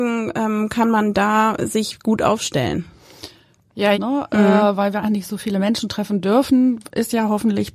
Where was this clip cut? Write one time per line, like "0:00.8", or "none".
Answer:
0:03.9
0:05.0